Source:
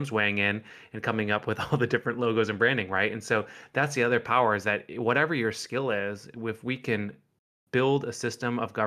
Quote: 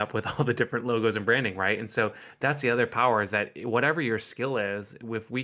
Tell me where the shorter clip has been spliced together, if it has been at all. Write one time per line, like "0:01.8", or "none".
none